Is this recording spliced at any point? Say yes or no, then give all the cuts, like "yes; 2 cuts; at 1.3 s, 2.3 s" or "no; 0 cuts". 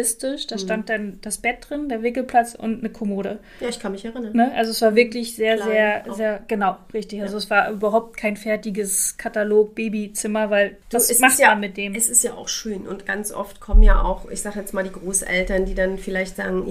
yes; 1 cut; at 10.8 s